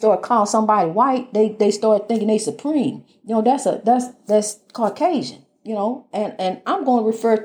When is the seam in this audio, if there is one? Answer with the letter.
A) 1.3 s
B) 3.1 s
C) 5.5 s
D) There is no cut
D